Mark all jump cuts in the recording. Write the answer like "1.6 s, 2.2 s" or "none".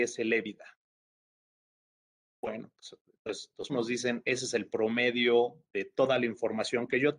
3.7 s